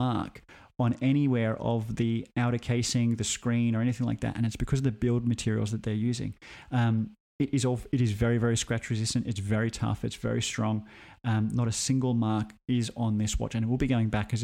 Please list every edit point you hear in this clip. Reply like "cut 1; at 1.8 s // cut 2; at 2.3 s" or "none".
none